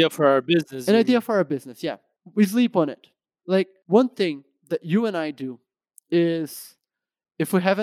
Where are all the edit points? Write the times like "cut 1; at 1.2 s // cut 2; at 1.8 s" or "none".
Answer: cut 1; at 3.4 s